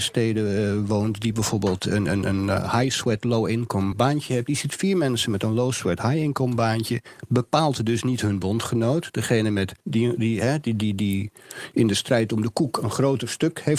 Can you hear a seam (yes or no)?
yes